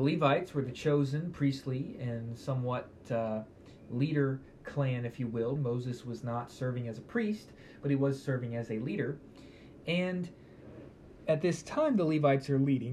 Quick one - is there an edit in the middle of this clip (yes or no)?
yes